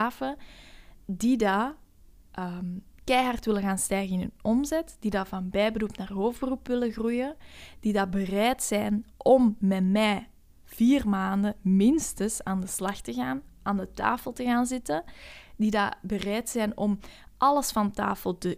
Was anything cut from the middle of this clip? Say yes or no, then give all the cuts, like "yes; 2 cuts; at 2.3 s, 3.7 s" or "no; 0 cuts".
no; 0 cuts